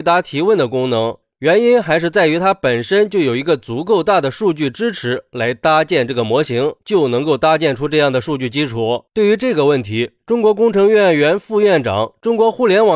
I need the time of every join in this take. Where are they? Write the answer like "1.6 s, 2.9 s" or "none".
1.2 s, 6.8 s, 9.1 s